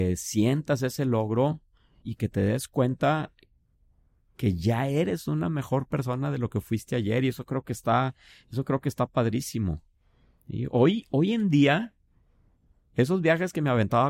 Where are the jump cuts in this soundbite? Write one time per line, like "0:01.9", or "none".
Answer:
0:02.0